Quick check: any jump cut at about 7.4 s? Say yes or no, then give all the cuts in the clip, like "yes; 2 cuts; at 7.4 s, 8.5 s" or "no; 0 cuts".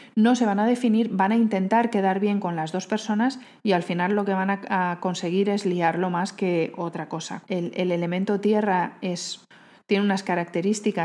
yes; 1 cut; at 7.4 s